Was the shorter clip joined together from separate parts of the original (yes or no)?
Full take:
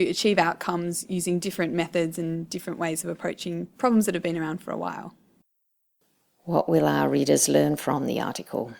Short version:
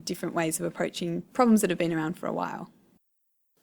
no